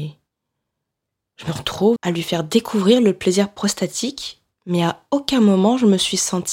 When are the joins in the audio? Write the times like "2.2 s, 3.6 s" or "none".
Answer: 2.0 s